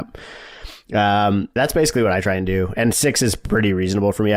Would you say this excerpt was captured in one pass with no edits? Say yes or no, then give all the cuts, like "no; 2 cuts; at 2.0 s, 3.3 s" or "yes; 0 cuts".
no; 1 cut; at 1.6 s